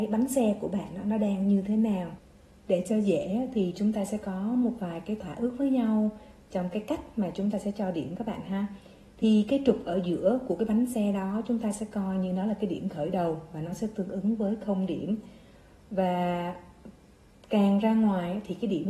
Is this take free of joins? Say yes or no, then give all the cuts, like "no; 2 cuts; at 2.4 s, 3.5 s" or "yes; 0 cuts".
yes; 0 cuts